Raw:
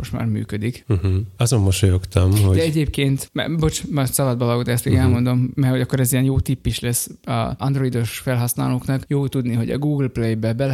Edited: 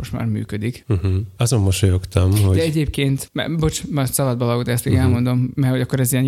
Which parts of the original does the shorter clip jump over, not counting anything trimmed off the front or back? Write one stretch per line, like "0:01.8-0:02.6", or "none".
none